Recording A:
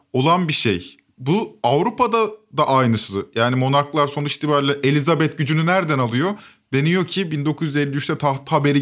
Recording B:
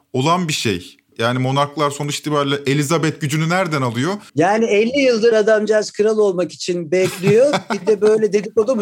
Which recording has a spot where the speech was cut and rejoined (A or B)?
B